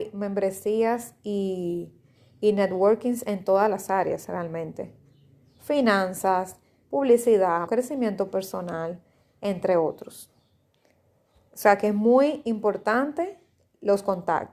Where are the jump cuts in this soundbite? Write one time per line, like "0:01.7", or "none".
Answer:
0:07.7